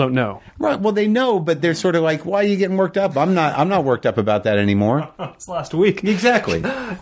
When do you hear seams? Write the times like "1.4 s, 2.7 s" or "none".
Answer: none